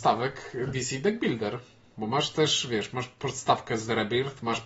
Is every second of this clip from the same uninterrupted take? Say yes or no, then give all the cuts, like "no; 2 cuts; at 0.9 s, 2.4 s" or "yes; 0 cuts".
yes; 0 cuts